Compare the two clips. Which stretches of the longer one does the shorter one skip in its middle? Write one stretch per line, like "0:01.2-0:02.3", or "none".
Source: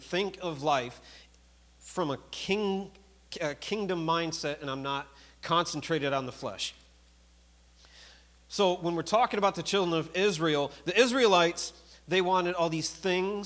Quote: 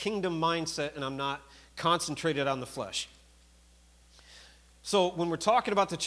none